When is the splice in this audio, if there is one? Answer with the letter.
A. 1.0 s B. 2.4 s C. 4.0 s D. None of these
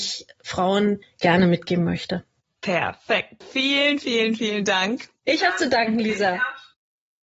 A